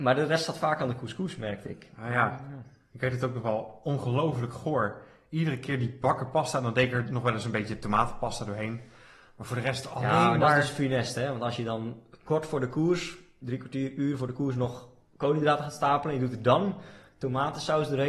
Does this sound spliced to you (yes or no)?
no